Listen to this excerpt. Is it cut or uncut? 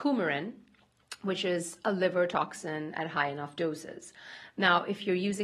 uncut